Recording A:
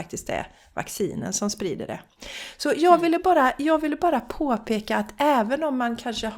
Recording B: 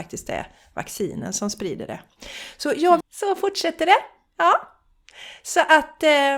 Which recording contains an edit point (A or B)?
B